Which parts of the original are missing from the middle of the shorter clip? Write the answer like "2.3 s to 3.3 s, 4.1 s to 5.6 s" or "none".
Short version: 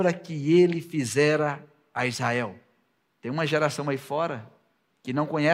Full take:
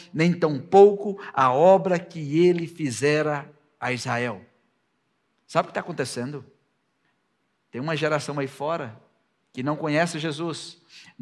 4.9 s to 7.6 s